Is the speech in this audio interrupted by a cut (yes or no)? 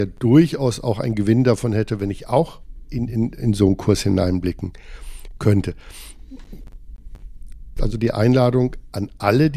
yes